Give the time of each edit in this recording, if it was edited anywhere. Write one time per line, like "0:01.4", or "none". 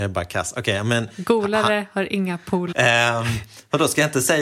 0:02.7